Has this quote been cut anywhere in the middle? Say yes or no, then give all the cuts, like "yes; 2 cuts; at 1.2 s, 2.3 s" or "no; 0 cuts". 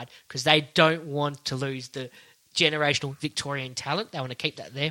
no; 0 cuts